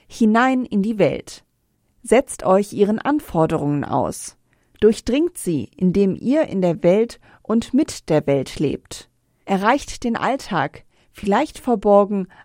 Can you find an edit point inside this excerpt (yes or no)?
yes